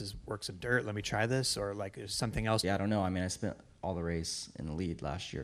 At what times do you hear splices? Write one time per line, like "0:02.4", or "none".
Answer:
0:02.6